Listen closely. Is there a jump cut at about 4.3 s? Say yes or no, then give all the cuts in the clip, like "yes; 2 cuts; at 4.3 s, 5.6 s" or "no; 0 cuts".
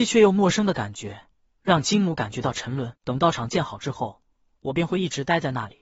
no; 1 cut; at 3.0 s